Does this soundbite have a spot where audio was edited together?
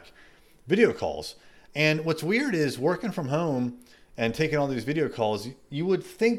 no; 0 cuts

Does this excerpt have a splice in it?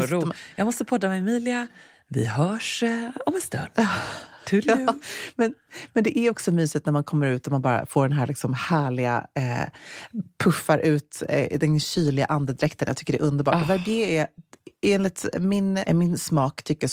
yes; 1 cut; at 15.9 s

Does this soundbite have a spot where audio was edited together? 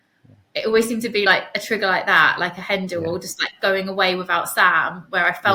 no; 0 cuts

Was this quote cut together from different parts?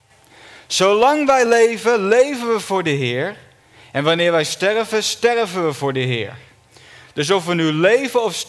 no; 0 cuts

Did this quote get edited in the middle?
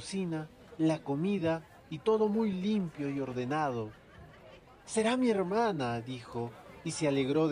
yes; 1 cut; at 4.8 s

